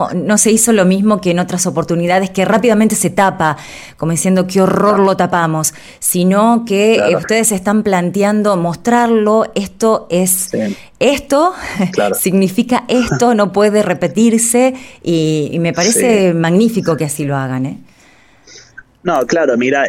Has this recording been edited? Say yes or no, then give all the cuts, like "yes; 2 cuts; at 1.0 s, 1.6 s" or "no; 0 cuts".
no; 0 cuts